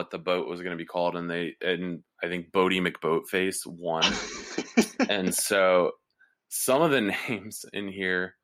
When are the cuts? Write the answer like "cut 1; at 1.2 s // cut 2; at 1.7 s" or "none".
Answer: none